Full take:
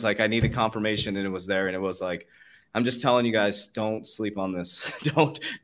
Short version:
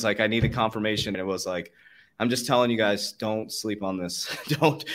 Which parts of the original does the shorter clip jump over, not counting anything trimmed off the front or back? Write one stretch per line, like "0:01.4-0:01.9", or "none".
0:01.1-0:01.7